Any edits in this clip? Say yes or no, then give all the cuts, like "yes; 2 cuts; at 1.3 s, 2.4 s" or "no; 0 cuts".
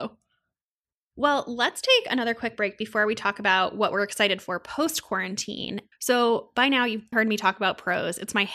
yes; 2 cuts; at 5.9 s, 7.1 s